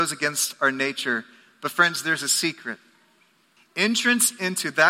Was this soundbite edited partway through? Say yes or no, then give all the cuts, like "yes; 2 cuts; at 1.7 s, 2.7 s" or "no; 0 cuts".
yes; 1 cut; at 3.6 s